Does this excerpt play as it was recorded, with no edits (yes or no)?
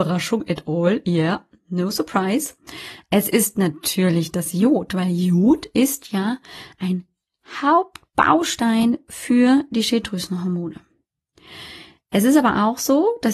yes